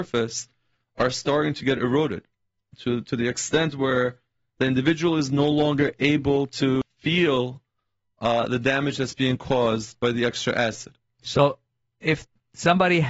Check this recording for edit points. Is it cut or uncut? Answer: cut